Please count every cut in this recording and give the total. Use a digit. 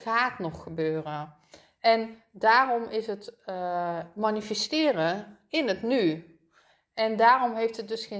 0